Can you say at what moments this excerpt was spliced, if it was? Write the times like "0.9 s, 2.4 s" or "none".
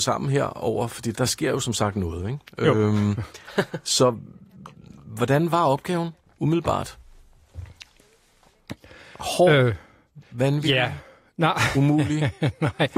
1.1 s